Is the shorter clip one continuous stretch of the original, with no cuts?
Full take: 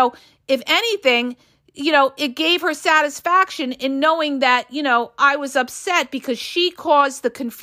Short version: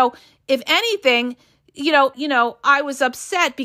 no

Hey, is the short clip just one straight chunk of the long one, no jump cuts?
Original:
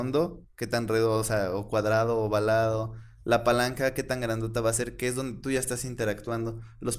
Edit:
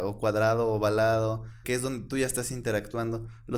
no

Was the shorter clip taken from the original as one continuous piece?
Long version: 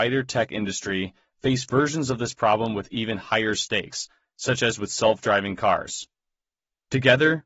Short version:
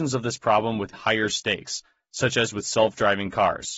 no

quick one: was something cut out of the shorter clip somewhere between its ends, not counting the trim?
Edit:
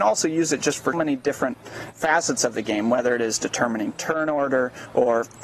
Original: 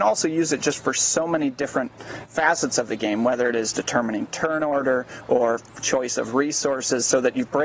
yes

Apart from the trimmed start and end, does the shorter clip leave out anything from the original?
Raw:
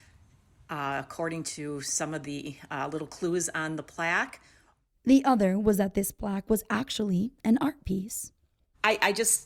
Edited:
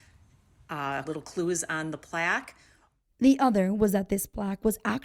yes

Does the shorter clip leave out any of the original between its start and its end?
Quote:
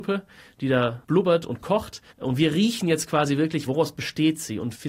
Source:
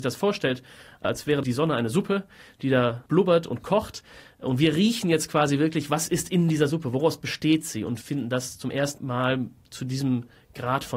yes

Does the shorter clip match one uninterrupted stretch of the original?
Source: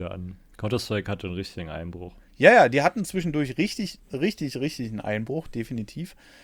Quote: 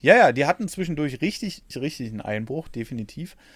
no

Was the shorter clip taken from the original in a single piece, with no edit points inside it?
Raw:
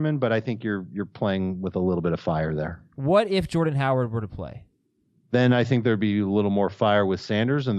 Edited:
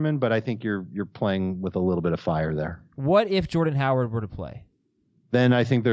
yes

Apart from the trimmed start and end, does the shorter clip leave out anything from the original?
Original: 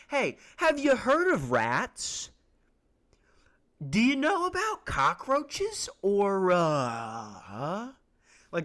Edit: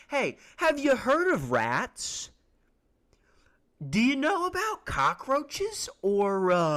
no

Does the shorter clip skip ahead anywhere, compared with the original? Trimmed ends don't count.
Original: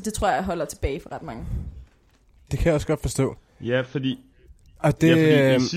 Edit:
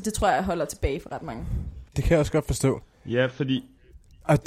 yes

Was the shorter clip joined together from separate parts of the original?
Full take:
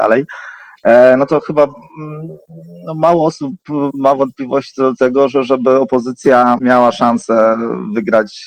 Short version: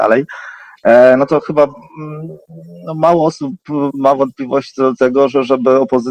no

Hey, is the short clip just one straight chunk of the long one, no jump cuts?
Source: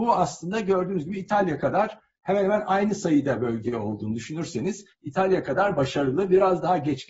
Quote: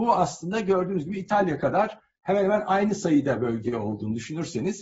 yes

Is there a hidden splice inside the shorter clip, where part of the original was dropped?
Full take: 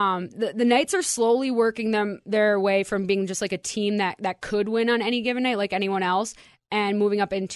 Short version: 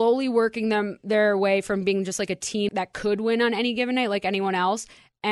yes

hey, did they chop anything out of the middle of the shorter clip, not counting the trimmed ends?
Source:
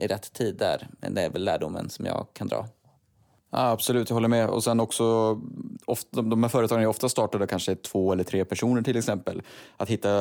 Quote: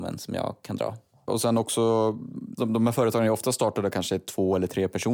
yes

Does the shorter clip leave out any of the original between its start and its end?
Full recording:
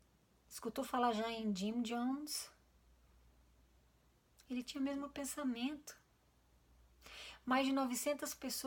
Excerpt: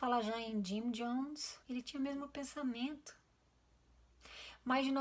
yes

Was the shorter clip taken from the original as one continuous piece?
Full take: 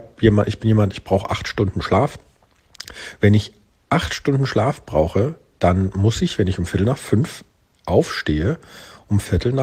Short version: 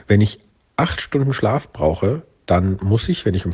yes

